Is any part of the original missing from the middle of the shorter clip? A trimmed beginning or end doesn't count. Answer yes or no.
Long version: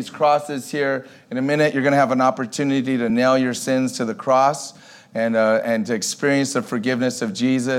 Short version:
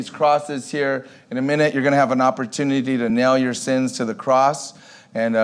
no